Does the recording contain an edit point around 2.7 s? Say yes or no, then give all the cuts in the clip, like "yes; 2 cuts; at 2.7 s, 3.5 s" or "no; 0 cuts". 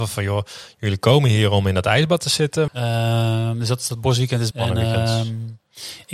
yes; 2 cuts; at 2.7 s, 4.5 s